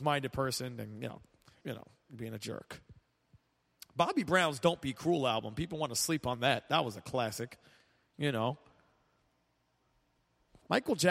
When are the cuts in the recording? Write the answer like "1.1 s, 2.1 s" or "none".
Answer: 1.6 s